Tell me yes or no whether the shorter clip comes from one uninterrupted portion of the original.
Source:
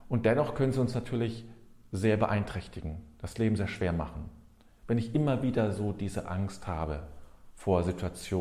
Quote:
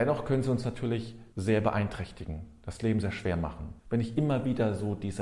no